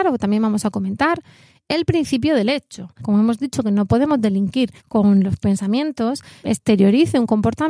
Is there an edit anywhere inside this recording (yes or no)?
yes